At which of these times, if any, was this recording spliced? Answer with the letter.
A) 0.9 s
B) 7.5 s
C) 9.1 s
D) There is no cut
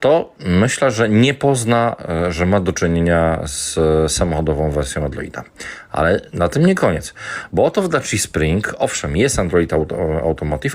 B